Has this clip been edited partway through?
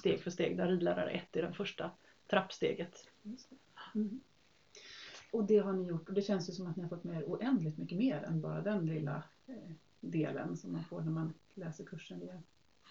yes; 1 cut; at 5.3 s

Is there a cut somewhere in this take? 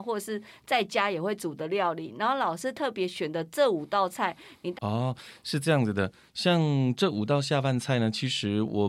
yes; 1 cut; at 4.7 s

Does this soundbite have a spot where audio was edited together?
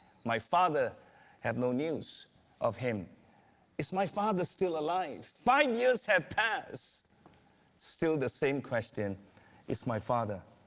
no; 0 cuts

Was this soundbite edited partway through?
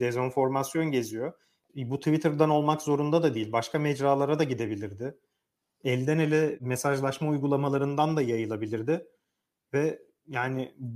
yes; 1 cut; at 1.7 s

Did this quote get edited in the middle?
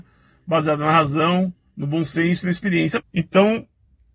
yes; 1 cut; at 3.0 s

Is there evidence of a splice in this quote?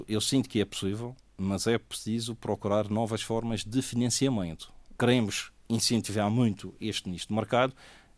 yes; 1 cut; at 5.0 s

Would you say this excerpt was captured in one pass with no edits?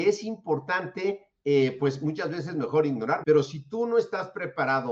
no; 1 cut; at 3.2 s

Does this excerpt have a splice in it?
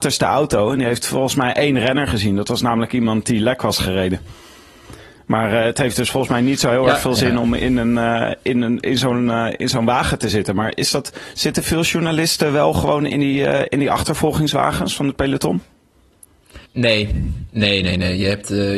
yes; 1 cut; at 16.7 s

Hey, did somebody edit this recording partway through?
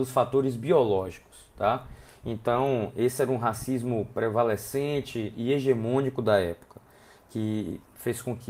no; 0 cuts

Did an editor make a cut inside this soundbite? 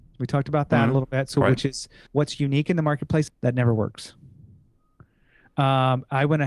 yes; 2 cuts; at 2.1 s, 3.3 s

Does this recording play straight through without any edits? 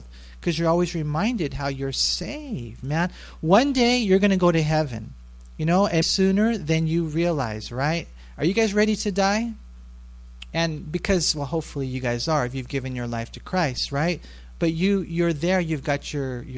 no; 2 cuts; at 6.0 s, 10.5 s

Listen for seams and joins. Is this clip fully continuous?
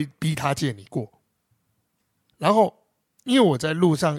no; 1 cut; at 2.3 s

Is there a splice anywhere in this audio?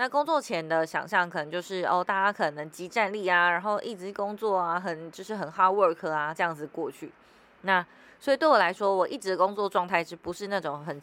no; 0 cuts

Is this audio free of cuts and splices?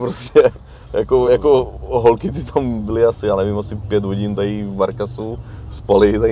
yes; 0 cuts

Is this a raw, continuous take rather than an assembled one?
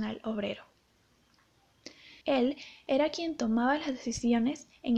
no; 1 cut; at 2.2 s

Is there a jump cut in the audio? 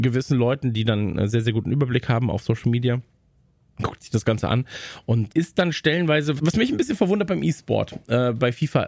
yes; 2 cuts; at 5.3 s, 6.4 s

